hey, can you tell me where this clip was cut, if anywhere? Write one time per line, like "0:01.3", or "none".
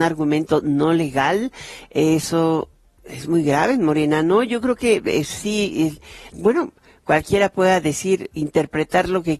0:06.3